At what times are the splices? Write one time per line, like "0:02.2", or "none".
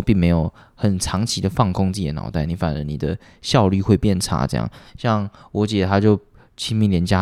none